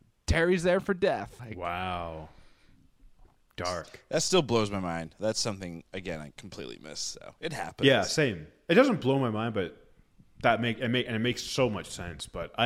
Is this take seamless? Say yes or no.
no